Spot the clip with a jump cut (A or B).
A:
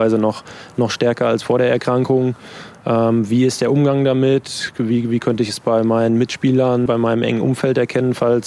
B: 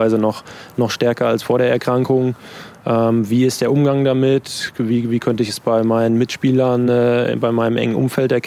A